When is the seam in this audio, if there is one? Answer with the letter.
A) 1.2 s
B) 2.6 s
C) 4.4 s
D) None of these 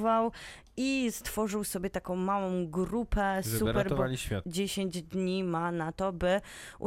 C